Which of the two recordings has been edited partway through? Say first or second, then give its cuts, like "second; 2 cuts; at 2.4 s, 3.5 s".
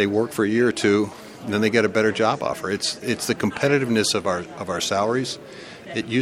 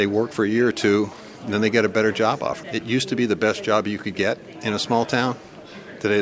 second; 1 cut; at 2.6 s